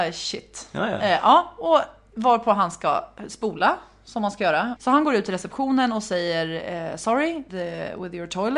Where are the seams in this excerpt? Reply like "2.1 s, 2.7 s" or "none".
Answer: 4.8 s, 7.5 s

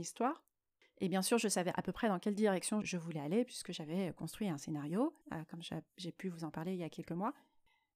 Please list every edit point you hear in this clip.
2.8 s, 5.2 s

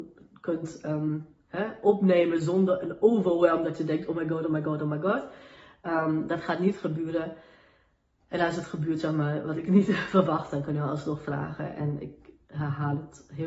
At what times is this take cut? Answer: none

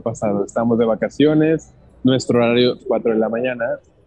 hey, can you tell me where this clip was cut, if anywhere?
2.8 s

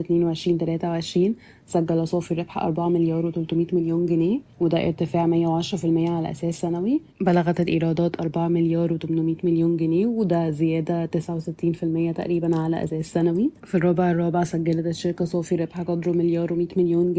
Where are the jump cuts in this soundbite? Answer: 4.5 s, 7.1 s, 13.6 s

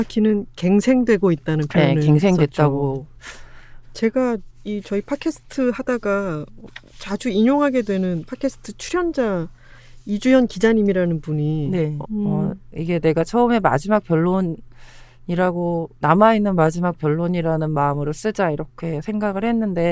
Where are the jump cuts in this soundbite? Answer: 3.8 s, 12.0 s

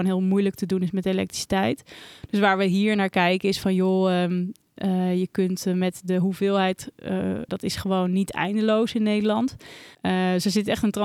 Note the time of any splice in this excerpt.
7.5 s, 9.9 s

